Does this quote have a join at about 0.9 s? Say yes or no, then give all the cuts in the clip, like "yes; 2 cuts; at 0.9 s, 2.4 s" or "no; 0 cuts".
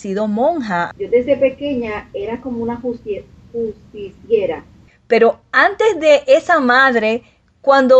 yes; 2 cuts; at 0.9 s, 4.9 s